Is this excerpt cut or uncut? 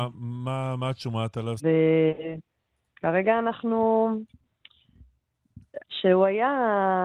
cut